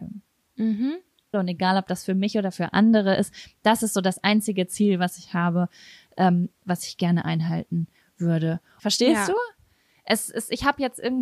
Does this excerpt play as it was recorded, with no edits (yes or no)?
no